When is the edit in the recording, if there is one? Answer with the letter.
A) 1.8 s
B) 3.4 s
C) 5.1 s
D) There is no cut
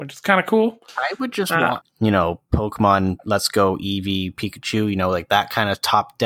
A